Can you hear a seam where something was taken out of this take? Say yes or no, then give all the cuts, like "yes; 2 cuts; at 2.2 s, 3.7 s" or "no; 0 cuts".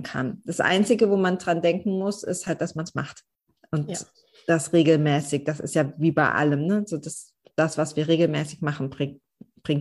no; 0 cuts